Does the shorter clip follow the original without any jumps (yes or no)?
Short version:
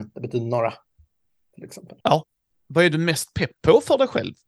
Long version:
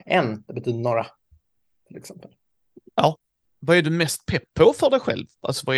no